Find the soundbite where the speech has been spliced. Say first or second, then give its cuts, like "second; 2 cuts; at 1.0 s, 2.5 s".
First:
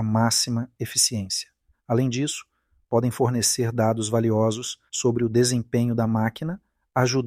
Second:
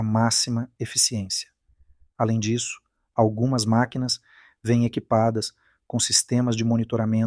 first; 2 cuts; at 1.7 s, 4.9 s